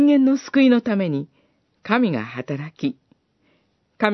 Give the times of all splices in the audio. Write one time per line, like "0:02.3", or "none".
none

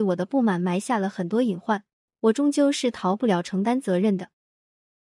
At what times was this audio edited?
none

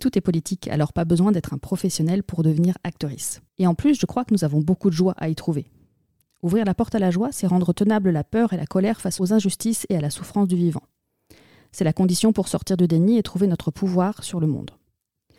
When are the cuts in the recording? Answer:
0:03.5

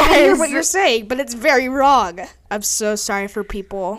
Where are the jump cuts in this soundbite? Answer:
0:02.5

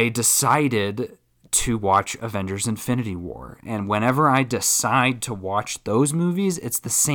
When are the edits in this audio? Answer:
none

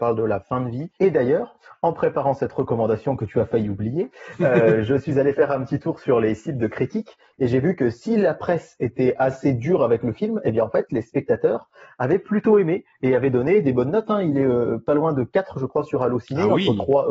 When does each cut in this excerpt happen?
0:01.0

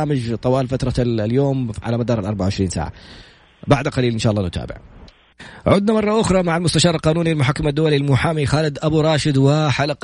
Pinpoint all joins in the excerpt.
none

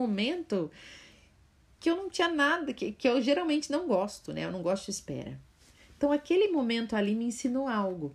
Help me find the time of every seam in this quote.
none

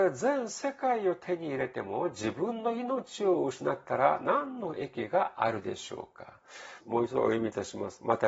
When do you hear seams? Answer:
0:06.8

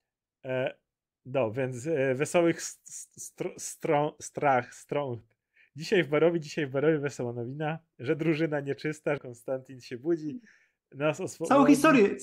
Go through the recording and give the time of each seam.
0:09.2

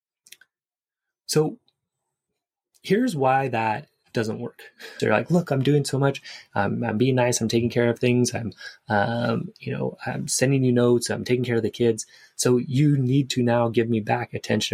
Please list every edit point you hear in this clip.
0:05.0

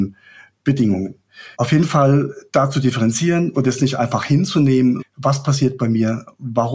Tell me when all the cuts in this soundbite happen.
0:01.5
0:05.0

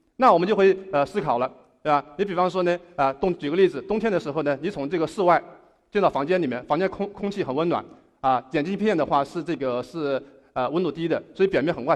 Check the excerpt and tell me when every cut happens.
none

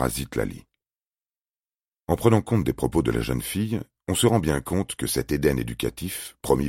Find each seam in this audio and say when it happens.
none

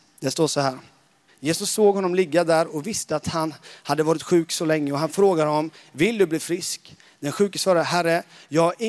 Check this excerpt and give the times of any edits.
0:01.3

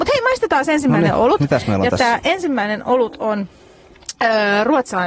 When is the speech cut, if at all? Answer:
none

